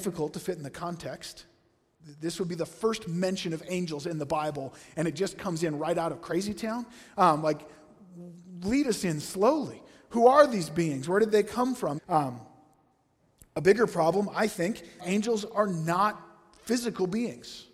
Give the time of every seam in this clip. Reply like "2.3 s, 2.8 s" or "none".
12.0 s, 15.0 s